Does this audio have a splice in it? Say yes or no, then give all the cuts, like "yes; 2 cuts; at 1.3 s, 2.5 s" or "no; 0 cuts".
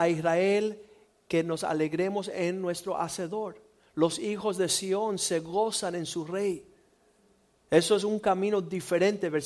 no; 0 cuts